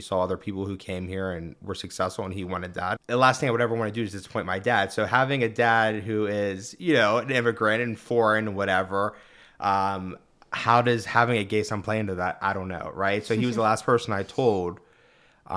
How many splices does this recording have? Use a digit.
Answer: 1